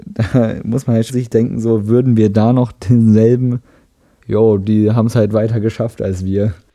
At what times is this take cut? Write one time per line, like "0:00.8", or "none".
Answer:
0:01.1
0:04.2